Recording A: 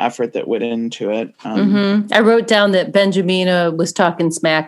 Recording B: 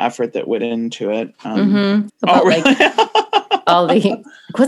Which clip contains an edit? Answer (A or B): B